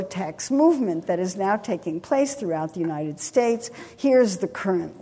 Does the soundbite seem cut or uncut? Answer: uncut